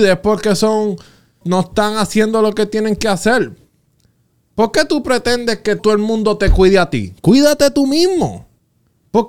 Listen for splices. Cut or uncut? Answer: cut